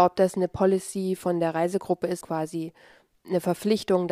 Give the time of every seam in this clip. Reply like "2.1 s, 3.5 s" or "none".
2.2 s

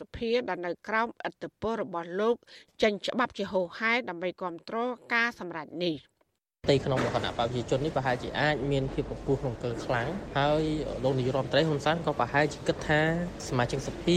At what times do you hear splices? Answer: none

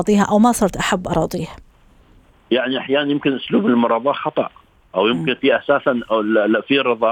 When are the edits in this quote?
none

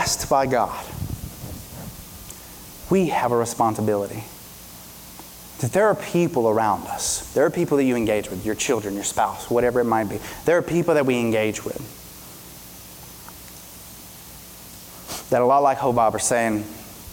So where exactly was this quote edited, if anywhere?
5.5 s

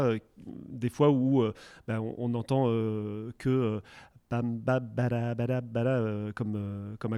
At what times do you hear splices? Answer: none

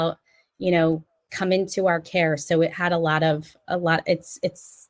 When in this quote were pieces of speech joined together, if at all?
1.3 s

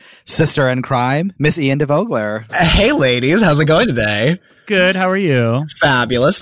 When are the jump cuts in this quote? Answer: 2.5 s

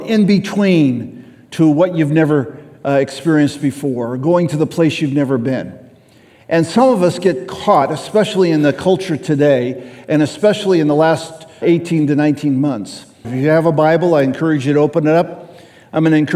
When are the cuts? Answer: 11.6 s, 13.2 s

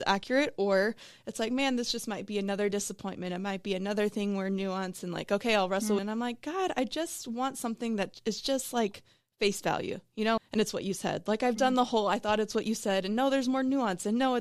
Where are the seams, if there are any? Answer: 6.0 s, 10.4 s

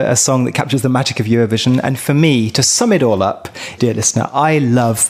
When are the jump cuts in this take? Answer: 3.8 s

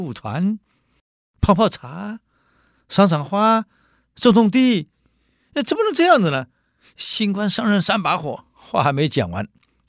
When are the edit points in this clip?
none

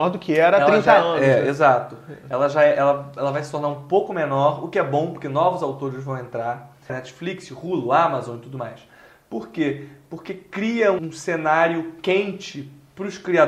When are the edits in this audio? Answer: 6.9 s, 11.0 s

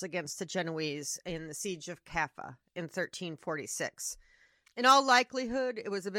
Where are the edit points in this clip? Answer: 4.6 s

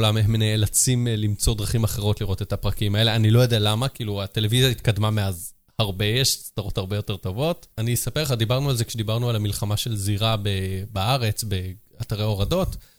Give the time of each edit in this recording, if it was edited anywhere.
7.7 s

